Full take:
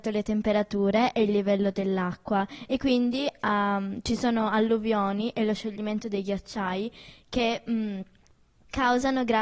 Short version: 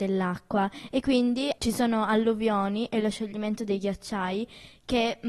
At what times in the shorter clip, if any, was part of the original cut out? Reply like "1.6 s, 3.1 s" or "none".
1.6 s